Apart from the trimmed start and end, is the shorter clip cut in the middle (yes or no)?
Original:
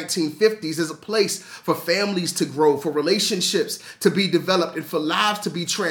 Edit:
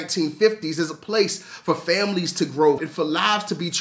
yes